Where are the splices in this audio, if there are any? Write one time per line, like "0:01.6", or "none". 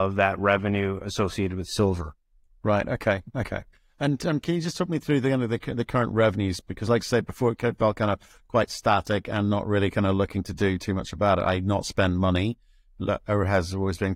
none